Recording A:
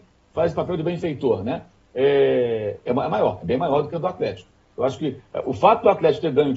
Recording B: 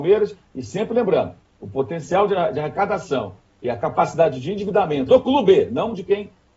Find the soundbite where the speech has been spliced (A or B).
B